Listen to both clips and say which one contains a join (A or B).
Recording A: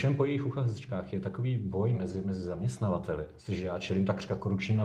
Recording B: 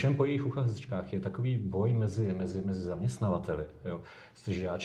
A